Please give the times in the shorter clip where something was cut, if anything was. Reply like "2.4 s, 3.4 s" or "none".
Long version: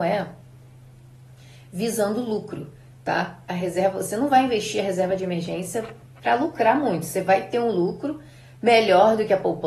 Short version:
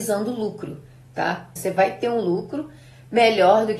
1.6 s

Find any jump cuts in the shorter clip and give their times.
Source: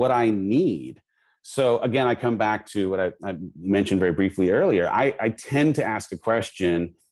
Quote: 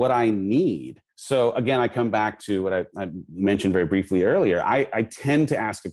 1.1 s

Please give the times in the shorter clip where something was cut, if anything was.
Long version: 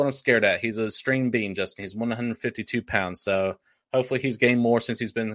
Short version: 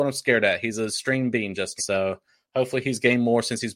1.8 s

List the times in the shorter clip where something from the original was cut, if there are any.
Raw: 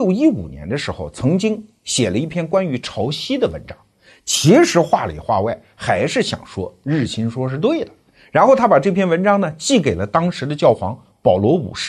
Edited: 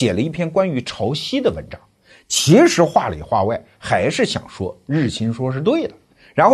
none

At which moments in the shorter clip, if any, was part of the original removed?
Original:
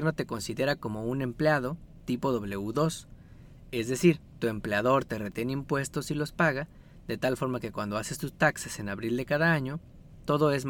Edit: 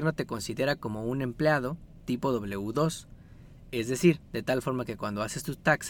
4.3 s

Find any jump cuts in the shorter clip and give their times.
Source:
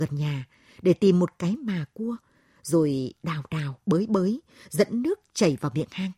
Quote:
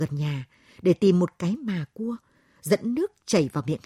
2.6 s

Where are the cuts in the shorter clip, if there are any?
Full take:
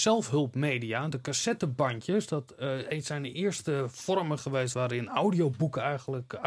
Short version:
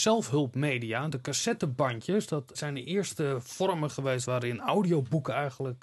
2.5 s

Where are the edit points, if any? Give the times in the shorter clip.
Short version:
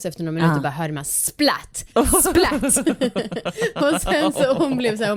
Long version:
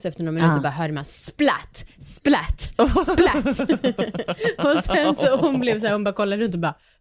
1.9 s

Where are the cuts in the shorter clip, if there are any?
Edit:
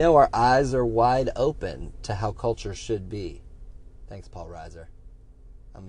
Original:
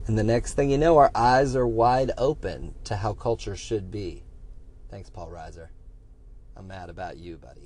none

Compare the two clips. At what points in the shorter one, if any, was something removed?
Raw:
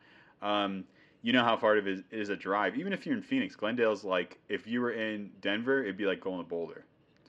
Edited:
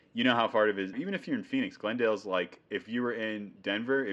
0.9 s

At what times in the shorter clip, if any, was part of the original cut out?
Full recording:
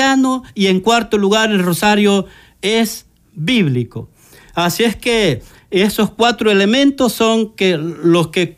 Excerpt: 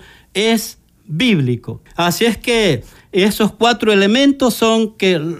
1.9 s

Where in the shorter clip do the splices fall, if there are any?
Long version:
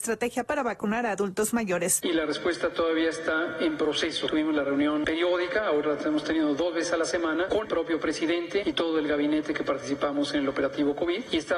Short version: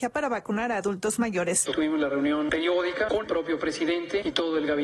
1.7 s, 3.1 s

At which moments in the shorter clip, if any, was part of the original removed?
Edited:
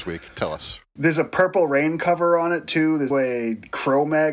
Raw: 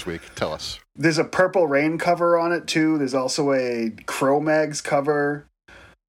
3.1 s

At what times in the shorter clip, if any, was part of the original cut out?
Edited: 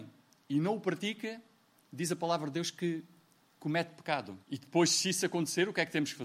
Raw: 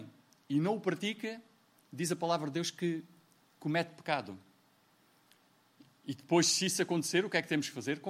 4.4 s

